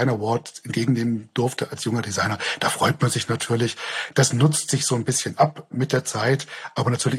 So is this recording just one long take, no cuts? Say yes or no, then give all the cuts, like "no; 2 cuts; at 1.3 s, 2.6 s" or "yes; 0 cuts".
yes; 0 cuts